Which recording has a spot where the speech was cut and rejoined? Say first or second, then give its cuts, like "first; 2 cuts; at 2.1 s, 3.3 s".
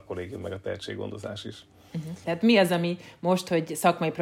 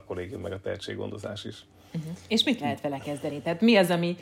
first; 1 cut; at 2.2 s